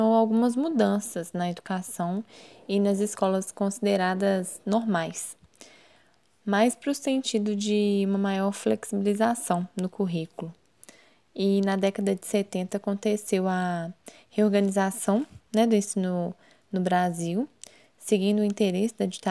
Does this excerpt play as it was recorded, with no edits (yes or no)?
yes